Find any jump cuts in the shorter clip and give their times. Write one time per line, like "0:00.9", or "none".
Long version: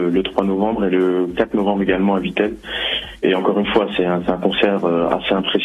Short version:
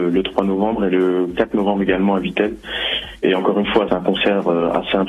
0:03.9

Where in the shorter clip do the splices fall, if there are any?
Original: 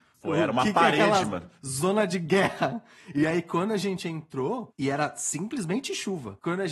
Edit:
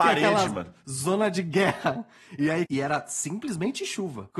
0:02.7

